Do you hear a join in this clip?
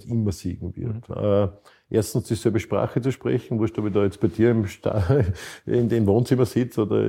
yes; 1 cut; at 1.1 s

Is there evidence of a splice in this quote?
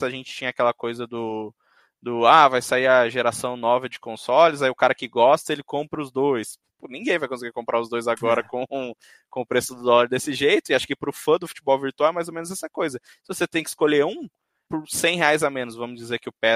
yes; 1 cut; at 14.7 s

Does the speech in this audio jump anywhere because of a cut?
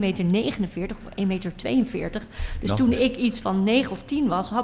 no; 0 cuts

